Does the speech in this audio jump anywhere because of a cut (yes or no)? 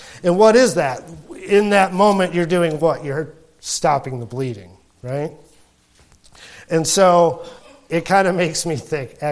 no